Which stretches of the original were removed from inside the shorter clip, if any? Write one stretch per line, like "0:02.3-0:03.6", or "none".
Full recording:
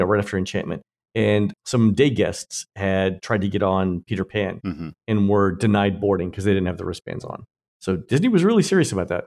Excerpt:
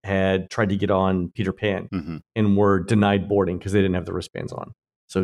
none